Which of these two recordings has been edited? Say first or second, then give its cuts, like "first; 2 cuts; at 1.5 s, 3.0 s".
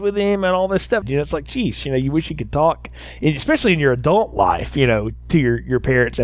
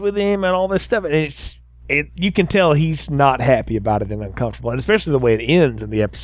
first; 1 cut; at 1.0 s